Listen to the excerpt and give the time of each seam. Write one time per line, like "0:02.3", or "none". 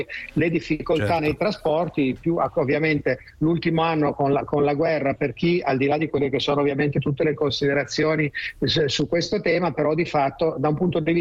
none